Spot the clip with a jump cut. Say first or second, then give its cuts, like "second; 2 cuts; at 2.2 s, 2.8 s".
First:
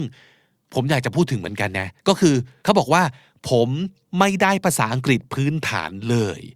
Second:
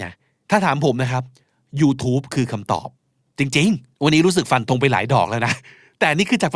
second; 1 cut; at 3.9 s